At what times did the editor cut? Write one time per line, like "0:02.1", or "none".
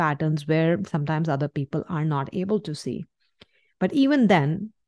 none